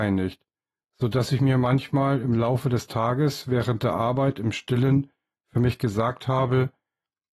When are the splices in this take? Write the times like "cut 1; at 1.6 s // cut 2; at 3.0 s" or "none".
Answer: none